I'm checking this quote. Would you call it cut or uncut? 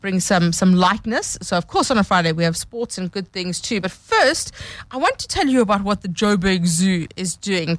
uncut